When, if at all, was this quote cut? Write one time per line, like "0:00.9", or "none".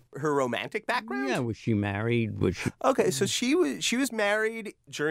none